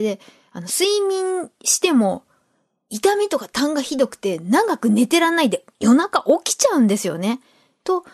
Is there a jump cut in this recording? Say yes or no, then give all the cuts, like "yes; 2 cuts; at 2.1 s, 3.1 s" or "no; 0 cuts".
yes; 1 cut; at 5.7 s